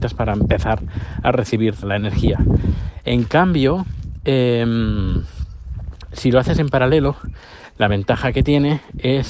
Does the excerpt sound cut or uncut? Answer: cut